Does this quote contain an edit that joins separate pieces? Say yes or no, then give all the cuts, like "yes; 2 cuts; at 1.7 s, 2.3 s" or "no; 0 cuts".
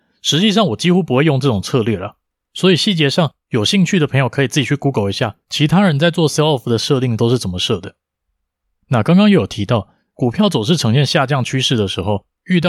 no; 0 cuts